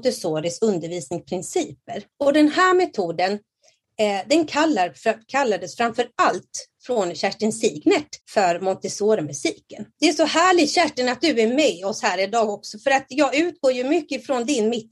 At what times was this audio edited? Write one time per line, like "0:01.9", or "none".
0:02.1
0:08.2
0:09.9